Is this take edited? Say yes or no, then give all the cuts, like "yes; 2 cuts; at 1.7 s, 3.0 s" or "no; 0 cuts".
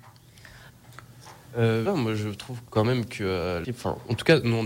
yes; 2 cuts; at 1.9 s, 3.6 s